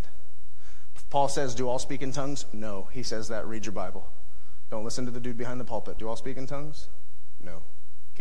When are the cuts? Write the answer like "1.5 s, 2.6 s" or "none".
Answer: 6.0 s